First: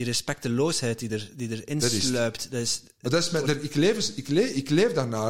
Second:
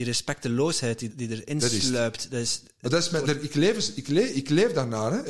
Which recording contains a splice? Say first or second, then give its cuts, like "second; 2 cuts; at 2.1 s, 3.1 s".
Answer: second; 1 cut; at 1.1 s